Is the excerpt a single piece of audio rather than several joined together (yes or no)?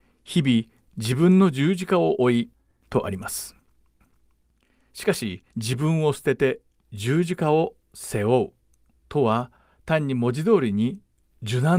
no